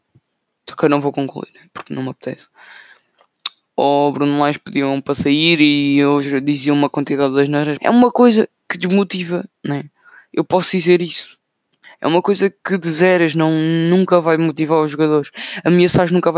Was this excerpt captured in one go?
no; 2 cuts; at 7.8 s, 11.8 s

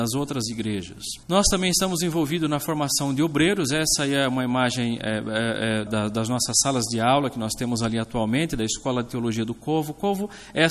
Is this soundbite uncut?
no; 2 cuts; at 1.2 s, 5.9 s

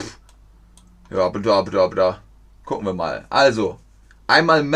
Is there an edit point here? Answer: no; 0 cuts

